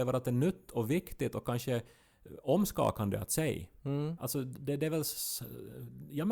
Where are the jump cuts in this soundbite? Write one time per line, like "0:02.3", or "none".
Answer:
0:04.2